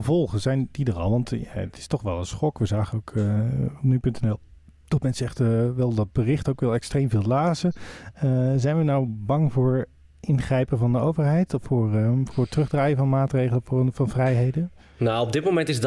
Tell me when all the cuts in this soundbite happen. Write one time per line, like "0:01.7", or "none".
0:12.3